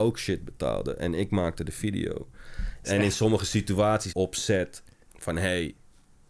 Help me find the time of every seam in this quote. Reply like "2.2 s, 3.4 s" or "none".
2.8 s, 4.1 s

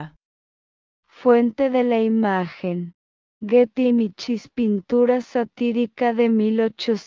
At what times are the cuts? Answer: none

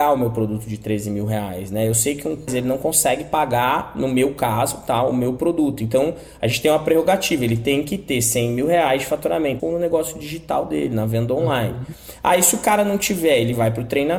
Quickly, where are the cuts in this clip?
2.5 s, 9.6 s

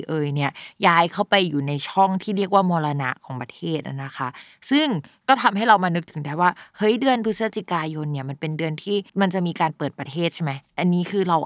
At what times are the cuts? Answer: 9.1 s

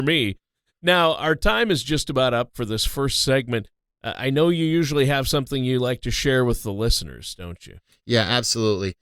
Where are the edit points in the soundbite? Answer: none

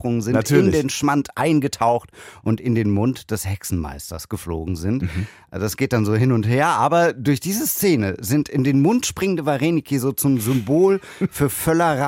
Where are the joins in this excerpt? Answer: none

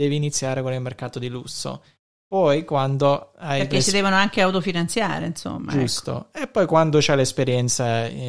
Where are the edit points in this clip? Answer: none

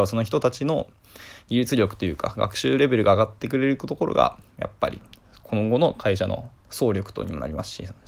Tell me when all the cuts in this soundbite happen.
6.6 s

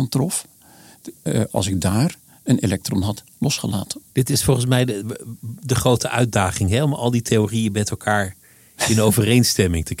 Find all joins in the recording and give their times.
4.1 s

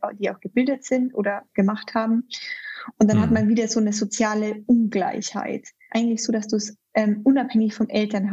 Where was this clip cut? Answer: 5.9 s

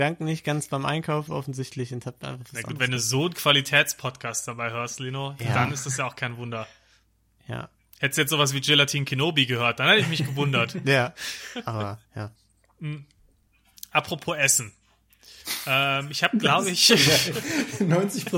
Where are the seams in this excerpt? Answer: none

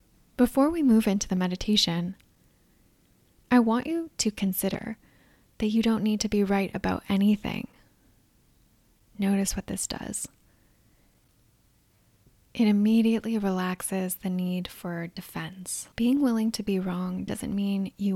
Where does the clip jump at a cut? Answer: 15.9 s

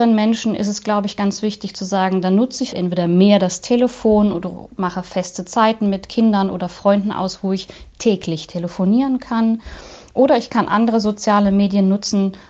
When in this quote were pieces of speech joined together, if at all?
2.7 s

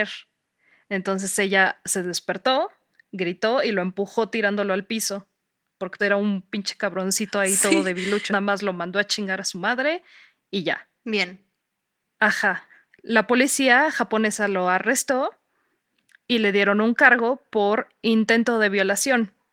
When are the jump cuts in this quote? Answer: 6.0 s, 8.3 s, 11.0 s

